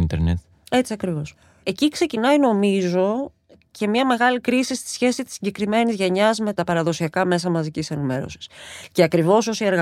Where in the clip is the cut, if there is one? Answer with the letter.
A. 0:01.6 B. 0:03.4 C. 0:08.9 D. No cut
D